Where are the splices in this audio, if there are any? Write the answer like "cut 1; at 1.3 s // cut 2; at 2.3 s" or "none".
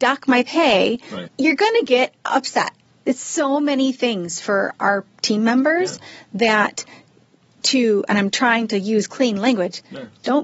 cut 1; at 1.3 s // cut 2; at 3.0 s

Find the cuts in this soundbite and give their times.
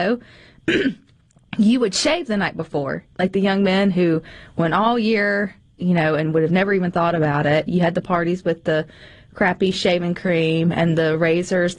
none

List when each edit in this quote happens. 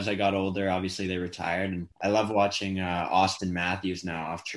cut 1; at 1.9 s

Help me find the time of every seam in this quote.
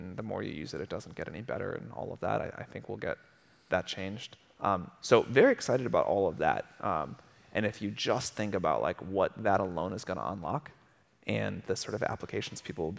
none

